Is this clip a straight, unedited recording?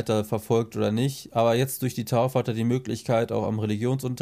yes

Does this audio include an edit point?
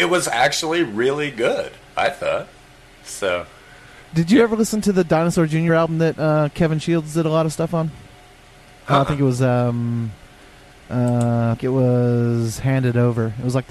no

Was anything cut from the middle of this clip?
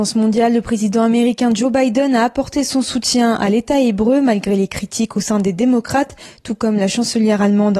no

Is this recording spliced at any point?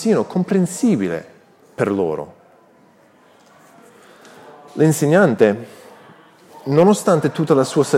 no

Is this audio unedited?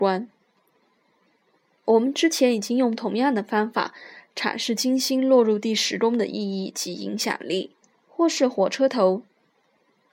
no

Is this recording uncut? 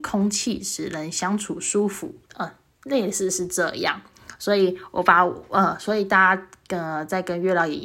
no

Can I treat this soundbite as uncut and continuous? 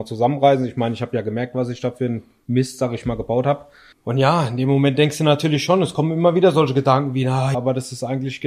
no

